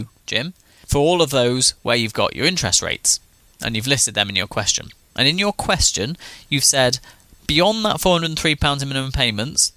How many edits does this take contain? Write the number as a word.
one